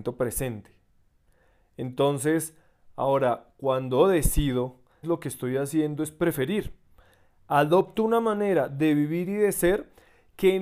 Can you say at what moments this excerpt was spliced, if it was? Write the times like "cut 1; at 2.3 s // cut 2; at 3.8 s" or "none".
cut 1; at 5.0 s

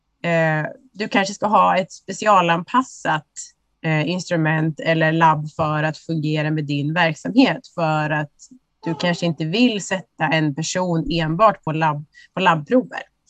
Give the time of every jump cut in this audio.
none

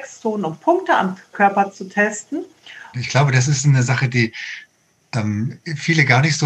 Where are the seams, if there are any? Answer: cut 1; at 1.3 s // cut 2; at 2.9 s

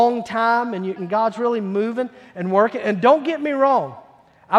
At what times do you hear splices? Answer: cut 1; at 1.0 s

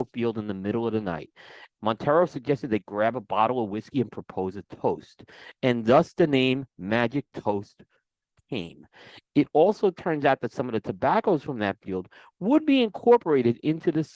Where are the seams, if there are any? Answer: cut 1; at 1.8 s

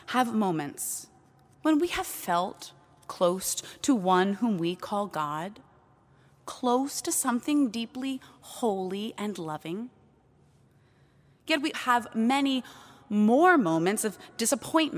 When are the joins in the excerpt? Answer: cut 1; at 11.7 s

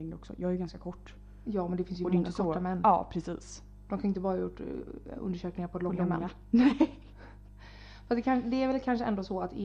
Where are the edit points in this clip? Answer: none

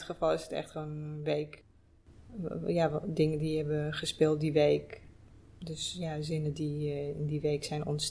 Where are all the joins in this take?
none

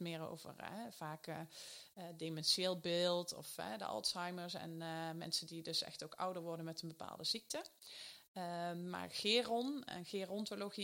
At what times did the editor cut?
none

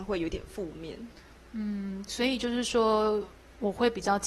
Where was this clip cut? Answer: cut 1; at 2.1 s

